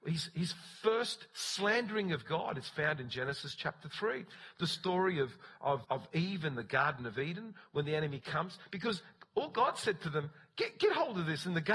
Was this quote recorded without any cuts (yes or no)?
no